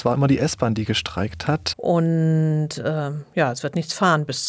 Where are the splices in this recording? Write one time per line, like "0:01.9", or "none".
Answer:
0:01.7

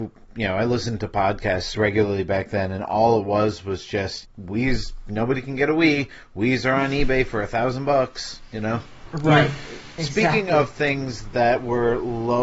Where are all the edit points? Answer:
0:04.2

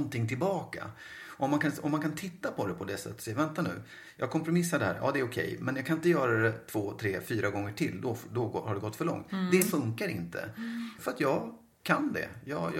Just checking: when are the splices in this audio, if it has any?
0:11.0

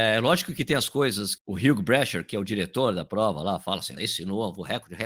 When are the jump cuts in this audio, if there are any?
0:01.4
0:04.0

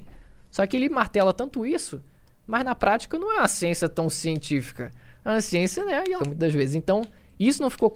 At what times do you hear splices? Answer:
0:06.2

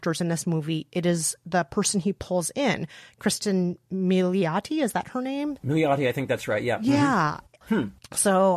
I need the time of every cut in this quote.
0:07.6

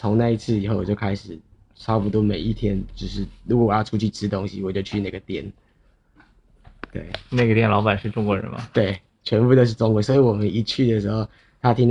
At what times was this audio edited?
none

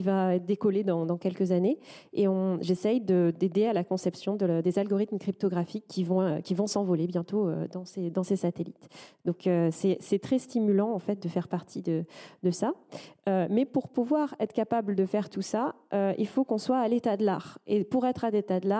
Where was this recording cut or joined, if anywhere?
none

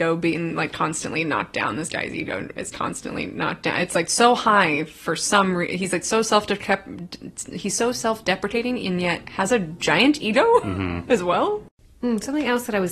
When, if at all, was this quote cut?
none

